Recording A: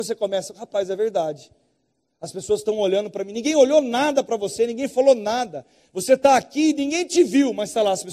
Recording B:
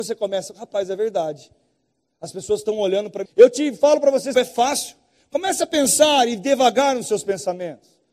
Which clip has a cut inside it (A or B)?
B